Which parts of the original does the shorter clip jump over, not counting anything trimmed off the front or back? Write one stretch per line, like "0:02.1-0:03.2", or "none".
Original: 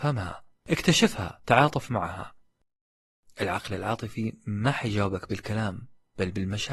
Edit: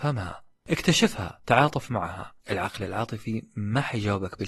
0:02.4-0:03.3